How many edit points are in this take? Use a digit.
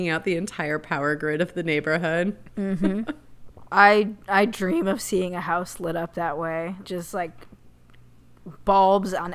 2